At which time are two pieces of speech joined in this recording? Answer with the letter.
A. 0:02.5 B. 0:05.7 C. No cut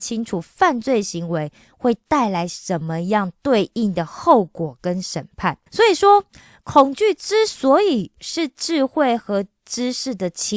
B